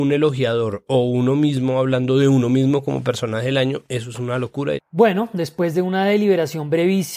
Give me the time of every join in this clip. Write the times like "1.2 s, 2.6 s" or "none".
4.8 s